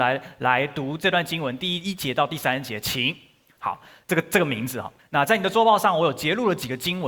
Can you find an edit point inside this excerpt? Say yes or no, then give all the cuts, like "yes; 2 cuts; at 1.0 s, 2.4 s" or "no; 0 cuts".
yes; 2 cuts; at 3.6 s, 5.0 s